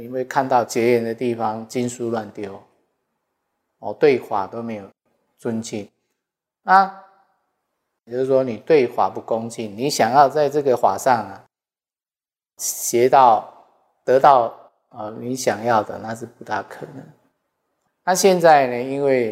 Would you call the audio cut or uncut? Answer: cut